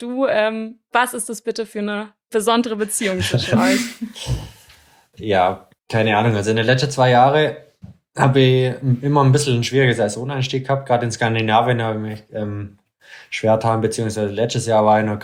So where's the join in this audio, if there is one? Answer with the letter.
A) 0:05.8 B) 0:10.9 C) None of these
A